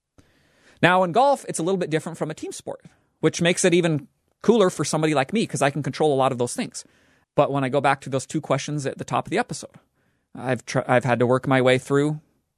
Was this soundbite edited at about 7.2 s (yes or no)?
yes